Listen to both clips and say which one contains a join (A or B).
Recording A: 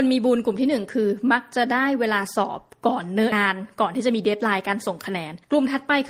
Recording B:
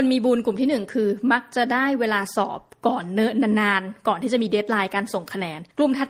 A